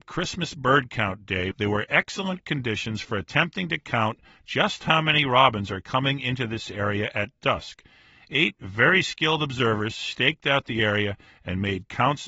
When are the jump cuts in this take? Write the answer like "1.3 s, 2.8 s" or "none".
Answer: 1.5 s